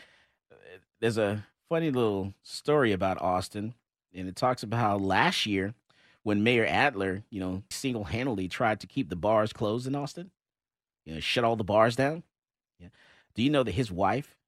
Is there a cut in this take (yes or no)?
yes